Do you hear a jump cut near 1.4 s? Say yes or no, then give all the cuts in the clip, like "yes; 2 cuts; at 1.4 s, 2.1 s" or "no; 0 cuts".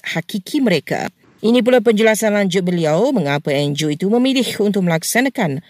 yes; 1 cut; at 1.4 s